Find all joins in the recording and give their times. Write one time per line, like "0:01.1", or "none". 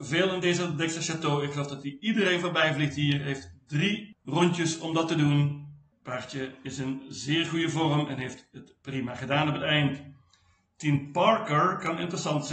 0:05.9